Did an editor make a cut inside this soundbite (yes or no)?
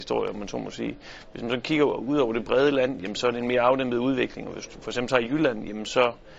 no